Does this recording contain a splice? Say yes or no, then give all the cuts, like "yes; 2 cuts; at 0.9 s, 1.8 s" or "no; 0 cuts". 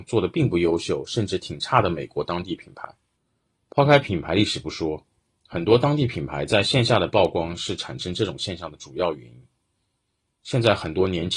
no; 0 cuts